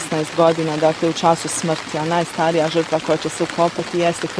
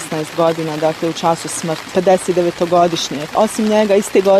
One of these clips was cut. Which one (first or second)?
second